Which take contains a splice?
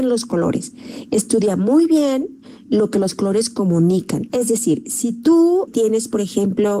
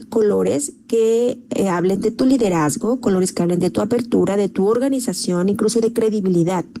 first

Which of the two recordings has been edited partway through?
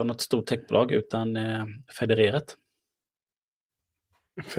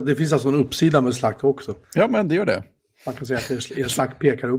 second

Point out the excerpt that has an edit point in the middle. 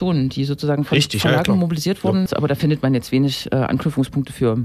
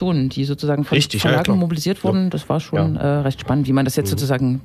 first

